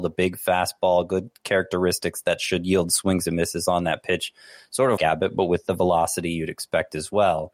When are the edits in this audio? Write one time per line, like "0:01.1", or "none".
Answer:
0:05.0